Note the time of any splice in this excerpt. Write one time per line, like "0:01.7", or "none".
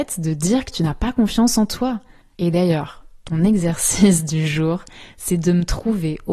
0:02.3